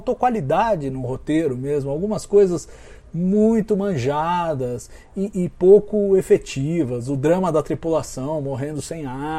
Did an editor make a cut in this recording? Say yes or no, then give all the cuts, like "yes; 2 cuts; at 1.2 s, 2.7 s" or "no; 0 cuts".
no; 0 cuts